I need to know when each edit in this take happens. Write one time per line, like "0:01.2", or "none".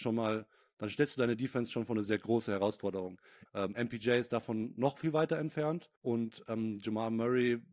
0:03.5
0:06.0